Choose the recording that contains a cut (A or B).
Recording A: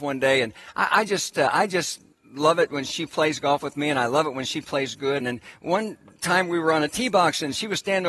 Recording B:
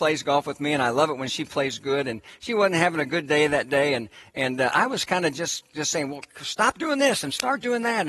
A